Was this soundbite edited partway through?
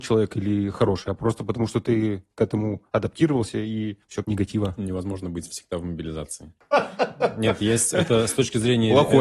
yes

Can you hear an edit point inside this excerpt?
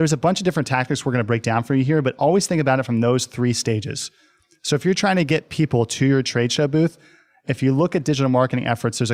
no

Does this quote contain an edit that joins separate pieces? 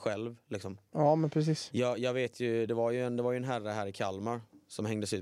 yes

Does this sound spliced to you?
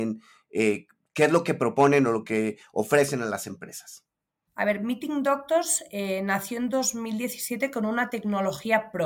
yes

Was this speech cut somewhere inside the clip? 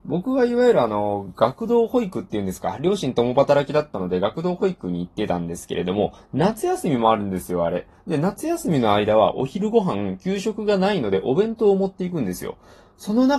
no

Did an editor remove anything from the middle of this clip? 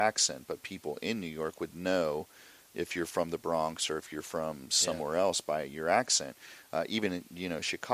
no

